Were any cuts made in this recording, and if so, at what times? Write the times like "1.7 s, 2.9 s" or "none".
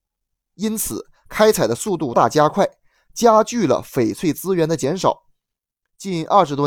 2.1 s